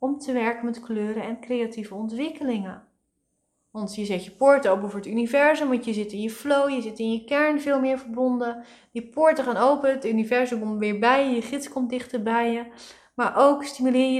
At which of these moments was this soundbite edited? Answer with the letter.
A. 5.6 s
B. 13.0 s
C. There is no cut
C